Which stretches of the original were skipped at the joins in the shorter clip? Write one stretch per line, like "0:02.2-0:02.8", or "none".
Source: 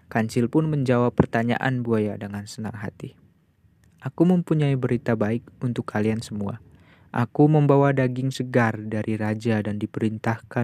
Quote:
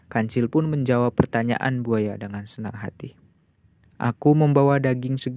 0:03.9-0:07.1